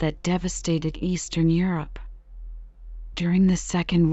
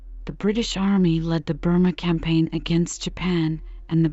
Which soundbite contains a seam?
first; 1 cut; at 3.1 s

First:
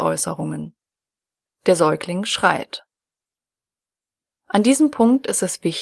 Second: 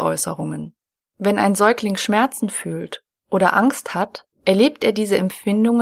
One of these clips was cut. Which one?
second; 2 cuts; at 1.0 s, 4.3 s

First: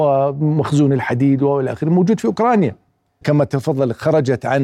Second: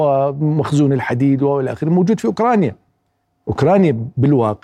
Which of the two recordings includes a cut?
first; 1 cut; at 3.2 s

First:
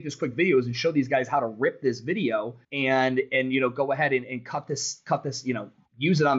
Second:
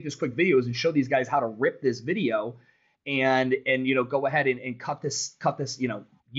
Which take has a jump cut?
first; 1 cut; at 2.6 s

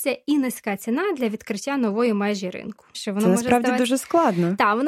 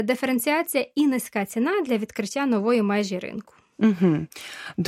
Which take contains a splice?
first; 1 cut; at 2.9 s

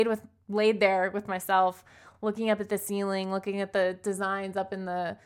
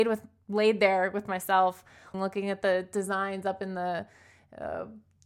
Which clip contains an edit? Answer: second; 1 cut; at 2.1 s

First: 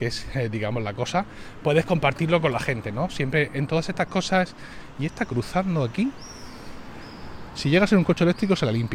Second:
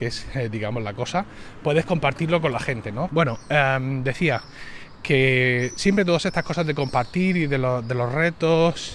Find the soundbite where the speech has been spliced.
second; 1 cut; at 3.1 s

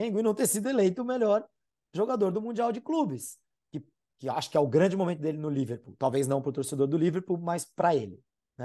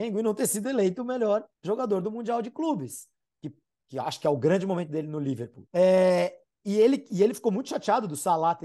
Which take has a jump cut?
second; 2 cuts; at 1.5 s, 5.7 s

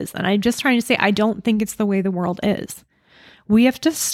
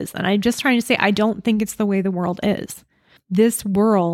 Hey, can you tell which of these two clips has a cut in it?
second; 1 cut; at 3.2 s

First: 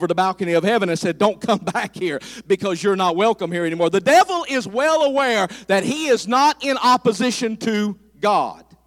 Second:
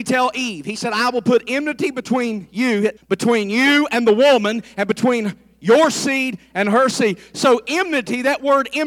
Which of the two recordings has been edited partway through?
second; 1 cut; at 3.0 s

